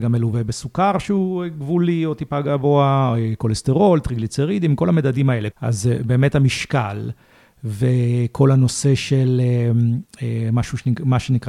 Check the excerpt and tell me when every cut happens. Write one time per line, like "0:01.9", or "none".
0:05.5